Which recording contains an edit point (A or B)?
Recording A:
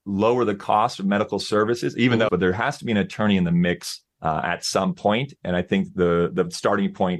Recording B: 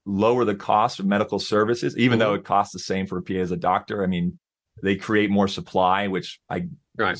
A